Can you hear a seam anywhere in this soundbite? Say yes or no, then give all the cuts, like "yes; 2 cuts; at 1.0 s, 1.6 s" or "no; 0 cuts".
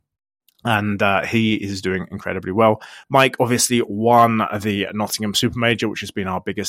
yes; 1 cut; at 3.0 s